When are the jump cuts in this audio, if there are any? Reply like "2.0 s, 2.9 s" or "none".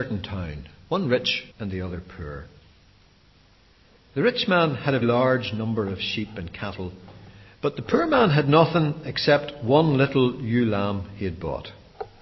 1.5 s, 5.0 s